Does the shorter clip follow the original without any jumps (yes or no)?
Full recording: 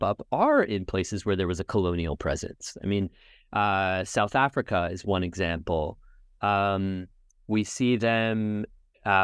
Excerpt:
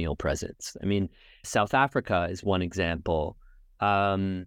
no